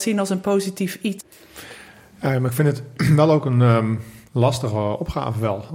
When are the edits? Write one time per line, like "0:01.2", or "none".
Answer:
0:01.2